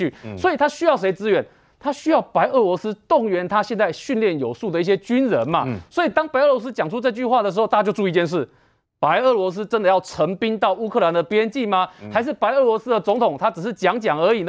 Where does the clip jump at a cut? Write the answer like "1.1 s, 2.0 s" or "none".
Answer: none